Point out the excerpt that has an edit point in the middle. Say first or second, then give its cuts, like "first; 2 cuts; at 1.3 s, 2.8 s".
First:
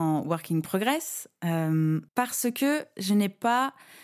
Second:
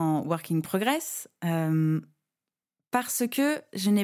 first; 1 cut; at 2.1 s